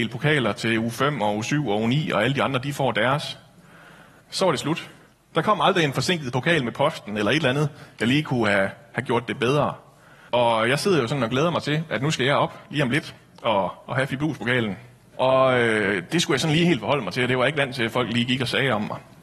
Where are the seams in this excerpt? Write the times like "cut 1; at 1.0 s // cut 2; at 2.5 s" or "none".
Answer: cut 1; at 4.2 s // cut 2; at 10.3 s // cut 3; at 15.1 s